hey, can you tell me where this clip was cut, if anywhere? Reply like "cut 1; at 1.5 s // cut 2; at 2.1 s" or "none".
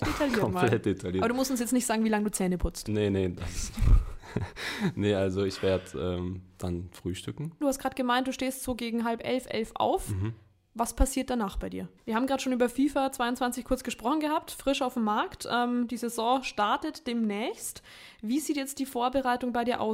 cut 1; at 7.6 s // cut 2; at 12.0 s